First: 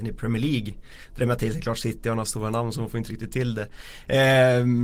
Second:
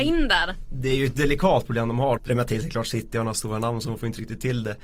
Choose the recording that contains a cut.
second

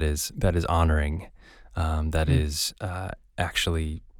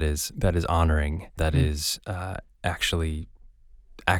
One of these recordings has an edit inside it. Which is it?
second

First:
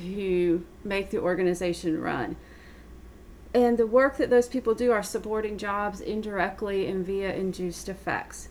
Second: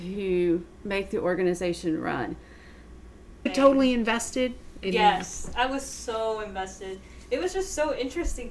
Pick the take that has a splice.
second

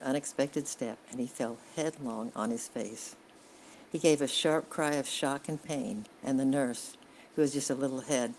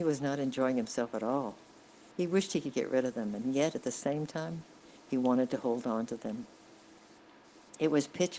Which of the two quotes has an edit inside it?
second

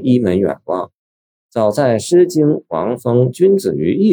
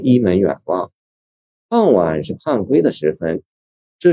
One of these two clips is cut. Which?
first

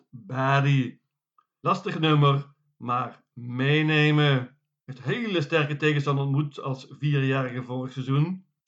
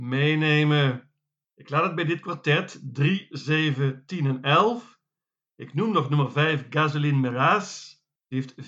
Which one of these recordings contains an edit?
first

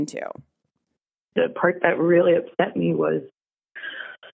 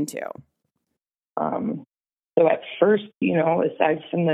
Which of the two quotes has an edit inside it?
second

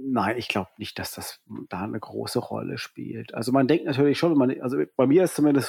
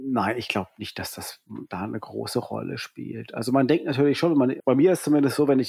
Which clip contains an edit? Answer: second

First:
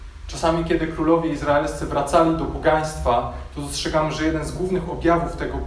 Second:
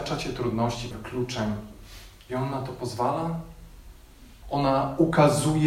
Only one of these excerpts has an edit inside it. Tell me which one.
second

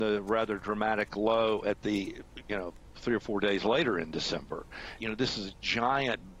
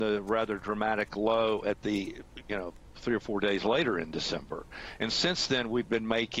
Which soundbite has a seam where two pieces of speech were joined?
first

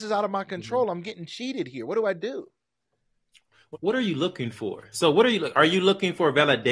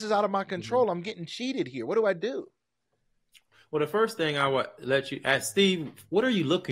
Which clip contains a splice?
first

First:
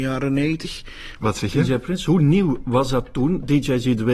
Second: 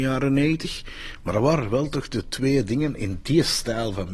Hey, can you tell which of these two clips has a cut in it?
first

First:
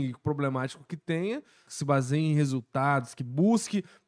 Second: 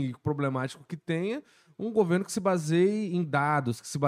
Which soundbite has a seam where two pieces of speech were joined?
first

